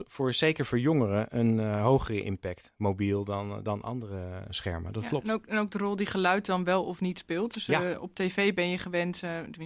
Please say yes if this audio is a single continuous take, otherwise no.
yes